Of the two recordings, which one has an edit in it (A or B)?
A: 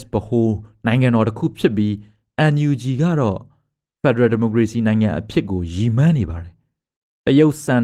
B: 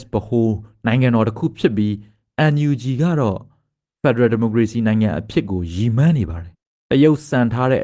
B